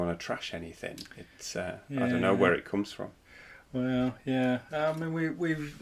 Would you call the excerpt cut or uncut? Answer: uncut